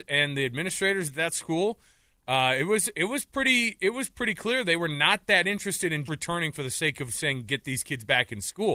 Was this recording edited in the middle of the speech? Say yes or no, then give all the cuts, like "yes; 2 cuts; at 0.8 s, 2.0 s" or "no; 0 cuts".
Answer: yes; 1 cut; at 6.1 s